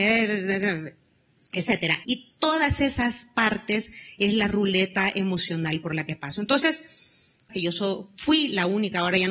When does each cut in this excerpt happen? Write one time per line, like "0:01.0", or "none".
0:02.0
0:07.5